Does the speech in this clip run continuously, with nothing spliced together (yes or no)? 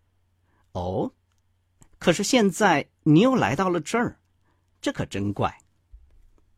yes